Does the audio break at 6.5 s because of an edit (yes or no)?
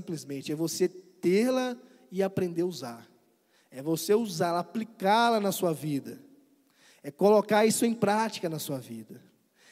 no